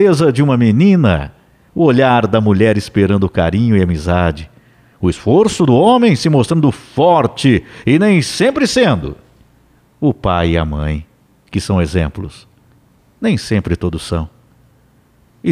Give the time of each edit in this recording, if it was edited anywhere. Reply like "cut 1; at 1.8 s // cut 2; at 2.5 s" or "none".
none